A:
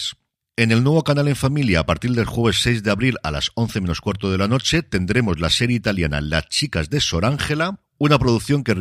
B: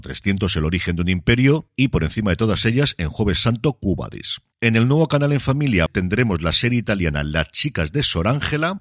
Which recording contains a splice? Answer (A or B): B